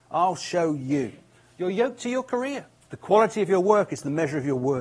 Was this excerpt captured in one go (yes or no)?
no